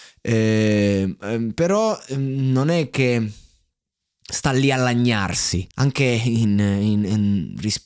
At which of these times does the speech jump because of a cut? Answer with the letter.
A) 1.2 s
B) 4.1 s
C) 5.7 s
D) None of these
C